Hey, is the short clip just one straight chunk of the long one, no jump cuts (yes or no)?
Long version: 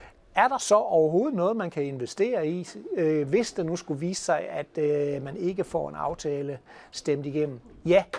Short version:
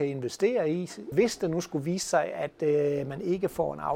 no